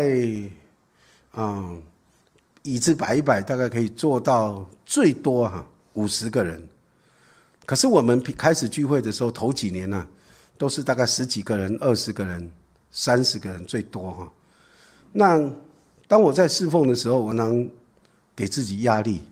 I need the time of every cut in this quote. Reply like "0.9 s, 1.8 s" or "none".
17.3 s